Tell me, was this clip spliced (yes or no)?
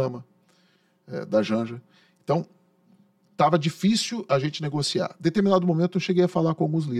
no